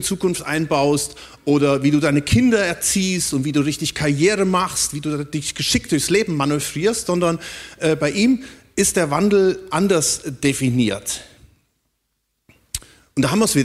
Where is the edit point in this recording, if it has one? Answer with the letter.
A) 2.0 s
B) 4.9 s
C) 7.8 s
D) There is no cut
D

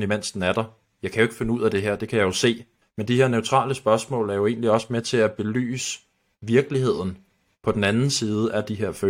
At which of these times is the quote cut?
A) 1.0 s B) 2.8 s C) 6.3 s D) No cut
B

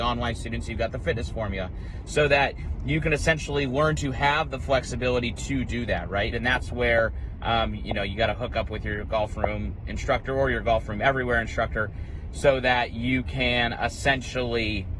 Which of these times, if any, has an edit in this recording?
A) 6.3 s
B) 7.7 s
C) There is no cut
A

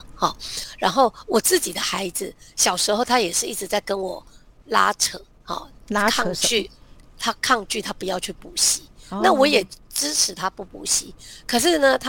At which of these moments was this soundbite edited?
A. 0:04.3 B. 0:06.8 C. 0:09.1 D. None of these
D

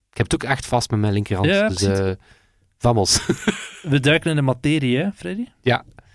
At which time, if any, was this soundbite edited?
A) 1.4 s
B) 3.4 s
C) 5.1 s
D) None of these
D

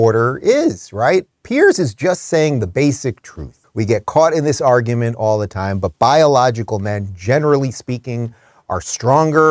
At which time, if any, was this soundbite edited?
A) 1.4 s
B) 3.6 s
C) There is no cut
B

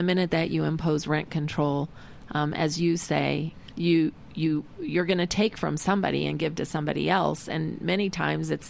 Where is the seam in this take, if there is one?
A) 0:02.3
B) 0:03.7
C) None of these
B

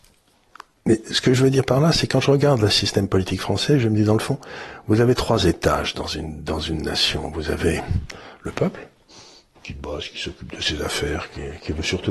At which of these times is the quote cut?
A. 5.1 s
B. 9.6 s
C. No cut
A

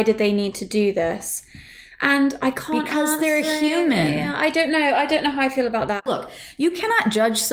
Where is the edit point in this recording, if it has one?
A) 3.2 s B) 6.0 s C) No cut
C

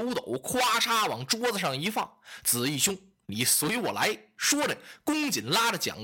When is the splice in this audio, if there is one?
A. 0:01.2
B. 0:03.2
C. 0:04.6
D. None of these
D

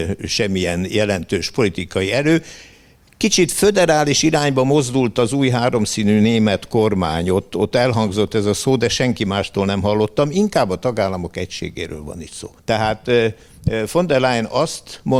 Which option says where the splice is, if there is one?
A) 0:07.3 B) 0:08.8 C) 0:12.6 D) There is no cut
C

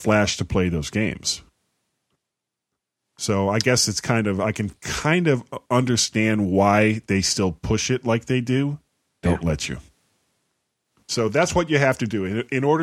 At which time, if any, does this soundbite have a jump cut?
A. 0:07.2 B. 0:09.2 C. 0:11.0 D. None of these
B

